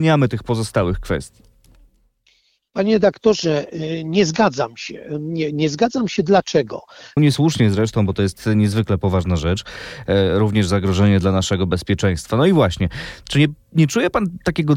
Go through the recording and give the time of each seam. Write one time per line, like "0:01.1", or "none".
0:07.2